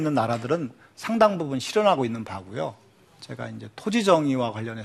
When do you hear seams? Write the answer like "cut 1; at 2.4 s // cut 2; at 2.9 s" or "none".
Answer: none